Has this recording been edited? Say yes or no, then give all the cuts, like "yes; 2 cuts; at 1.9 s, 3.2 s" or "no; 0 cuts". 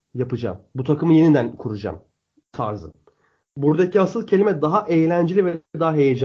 no; 0 cuts